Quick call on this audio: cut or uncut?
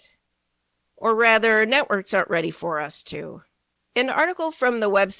cut